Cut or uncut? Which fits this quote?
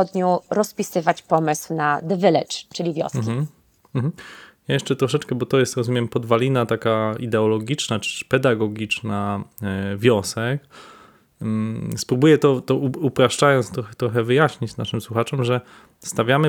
uncut